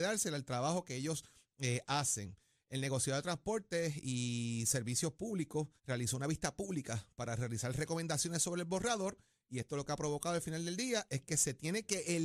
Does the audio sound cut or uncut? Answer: cut